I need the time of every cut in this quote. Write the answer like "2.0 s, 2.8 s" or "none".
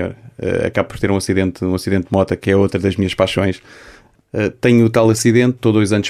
none